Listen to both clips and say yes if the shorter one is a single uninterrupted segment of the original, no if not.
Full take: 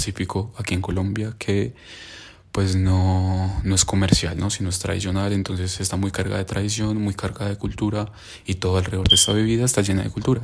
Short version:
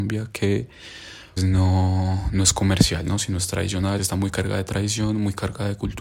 no